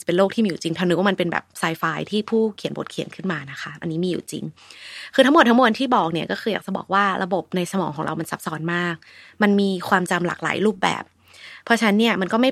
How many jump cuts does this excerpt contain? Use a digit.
0